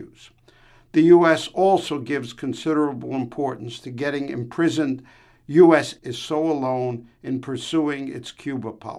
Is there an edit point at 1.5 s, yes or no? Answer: no